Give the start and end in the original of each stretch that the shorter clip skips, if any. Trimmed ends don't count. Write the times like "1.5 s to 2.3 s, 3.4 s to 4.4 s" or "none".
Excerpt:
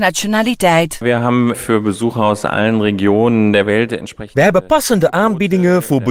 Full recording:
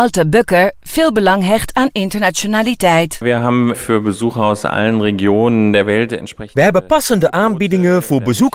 none